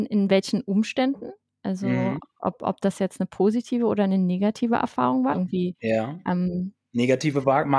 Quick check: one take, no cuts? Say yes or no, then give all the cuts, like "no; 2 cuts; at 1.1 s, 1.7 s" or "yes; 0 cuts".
no; 1 cut; at 5.3 s